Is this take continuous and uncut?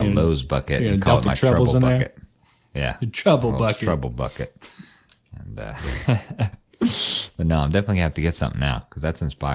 yes; 0 cuts

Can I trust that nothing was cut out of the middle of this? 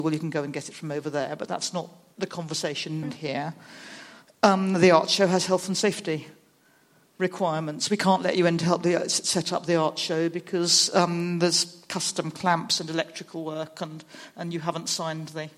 no; 1 cut; at 3.0 s

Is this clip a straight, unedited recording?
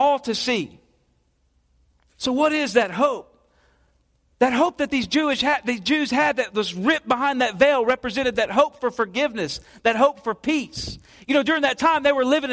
yes; 0 cuts

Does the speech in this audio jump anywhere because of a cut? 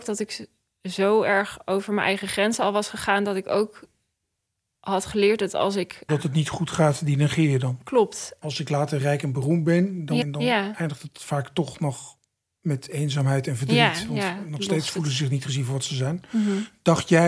yes; 3 cuts; at 6.1 s, 8.4 s, 10.2 s

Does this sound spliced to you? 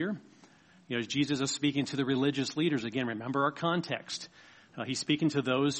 no; 0 cuts

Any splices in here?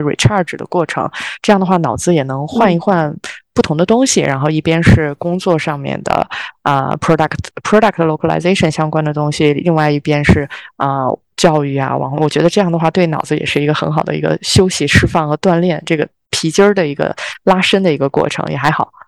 no; 0 cuts

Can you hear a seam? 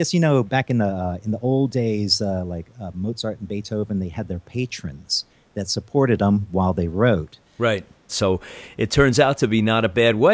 yes; 1 cut; at 8.1 s

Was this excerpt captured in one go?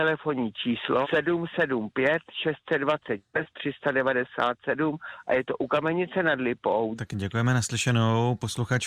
no; 2 cuts; at 1.0 s, 7.0 s

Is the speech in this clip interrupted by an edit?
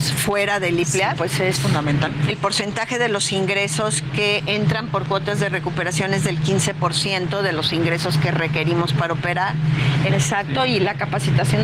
yes; 3 cuts; at 1.2 s, 2.3 s, 10.1 s

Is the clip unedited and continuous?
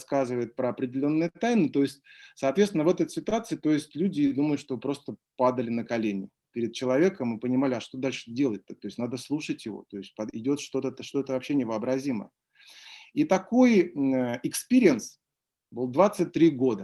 yes; 0 cuts

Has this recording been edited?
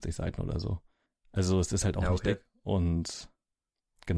no; 0 cuts

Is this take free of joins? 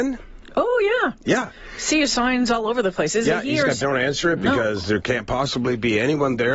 no; 1 cut; at 3.8 s

